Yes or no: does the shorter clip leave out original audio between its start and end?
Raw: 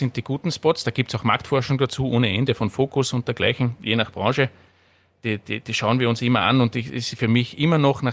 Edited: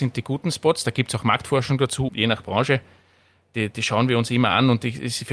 yes